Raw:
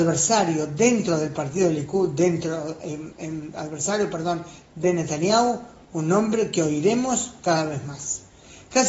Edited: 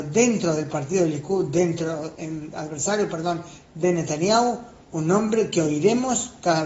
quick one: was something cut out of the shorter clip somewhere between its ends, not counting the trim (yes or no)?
yes